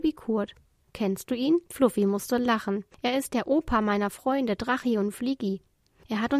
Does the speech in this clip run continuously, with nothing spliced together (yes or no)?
no